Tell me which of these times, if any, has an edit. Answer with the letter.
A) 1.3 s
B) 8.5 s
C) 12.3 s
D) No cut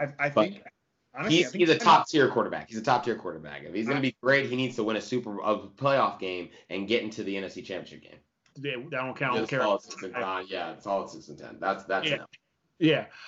B